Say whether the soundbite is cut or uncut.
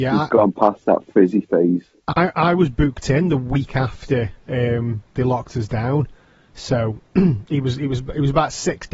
uncut